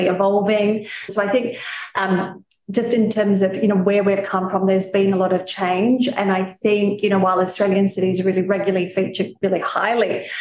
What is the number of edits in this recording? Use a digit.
1